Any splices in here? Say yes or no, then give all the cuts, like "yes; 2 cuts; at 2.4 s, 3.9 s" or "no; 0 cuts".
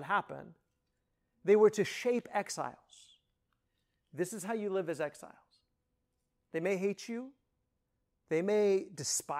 no; 0 cuts